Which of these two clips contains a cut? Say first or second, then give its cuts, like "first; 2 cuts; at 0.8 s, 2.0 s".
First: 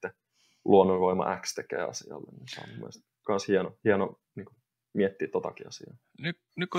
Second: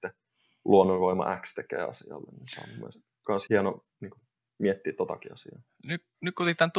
second; 1 cut; at 3.5 s